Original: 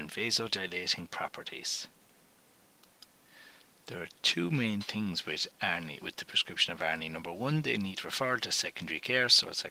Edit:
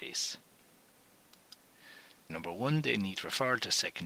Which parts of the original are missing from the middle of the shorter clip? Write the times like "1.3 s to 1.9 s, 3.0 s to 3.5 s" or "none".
3.8 s to 7.1 s